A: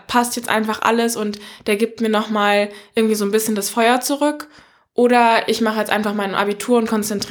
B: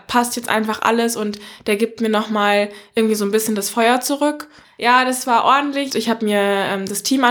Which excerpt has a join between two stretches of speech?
B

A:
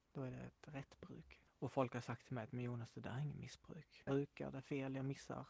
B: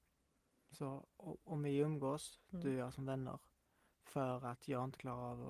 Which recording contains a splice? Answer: A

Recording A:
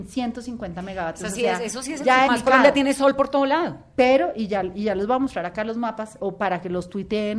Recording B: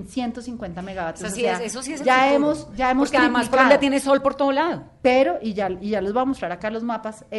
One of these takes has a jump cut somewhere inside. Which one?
A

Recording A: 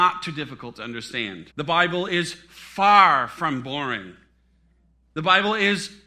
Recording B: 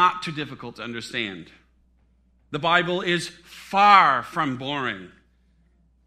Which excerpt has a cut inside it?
A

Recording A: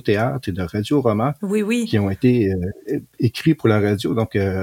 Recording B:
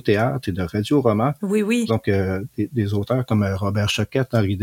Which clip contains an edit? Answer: B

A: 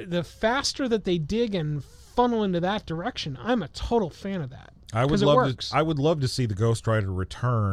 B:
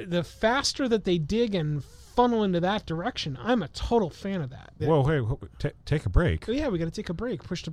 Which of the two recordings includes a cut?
B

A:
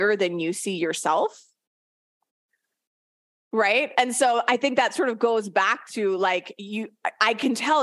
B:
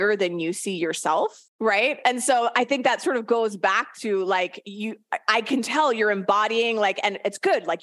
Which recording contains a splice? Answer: B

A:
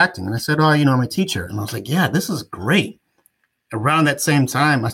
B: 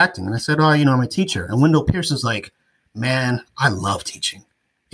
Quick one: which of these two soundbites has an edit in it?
A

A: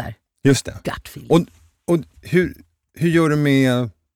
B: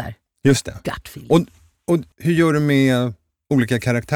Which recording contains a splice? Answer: B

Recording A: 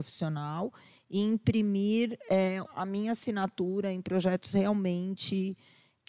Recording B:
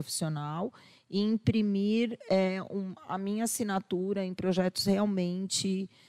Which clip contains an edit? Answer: A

